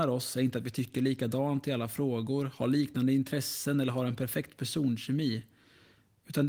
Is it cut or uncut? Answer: uncut